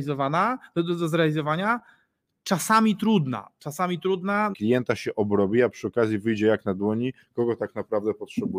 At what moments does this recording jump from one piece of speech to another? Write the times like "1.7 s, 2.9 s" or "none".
4.5 s